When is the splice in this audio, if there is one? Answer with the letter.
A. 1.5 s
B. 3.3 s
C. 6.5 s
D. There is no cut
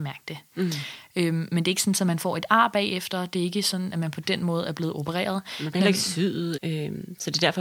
C